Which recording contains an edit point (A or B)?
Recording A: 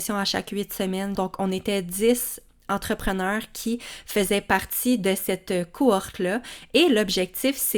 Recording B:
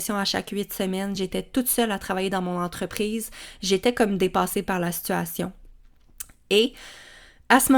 A